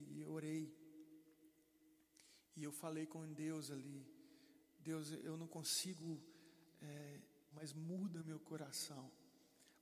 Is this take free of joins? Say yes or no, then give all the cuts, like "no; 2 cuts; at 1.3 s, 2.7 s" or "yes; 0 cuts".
no; 1 cut; at 7.5 s